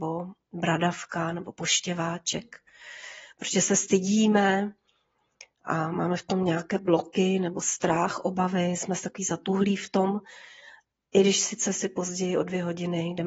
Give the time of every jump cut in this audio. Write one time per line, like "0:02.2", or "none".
none